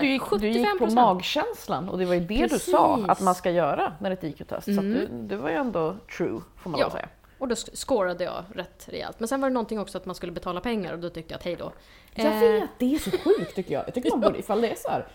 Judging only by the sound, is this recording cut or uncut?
uncut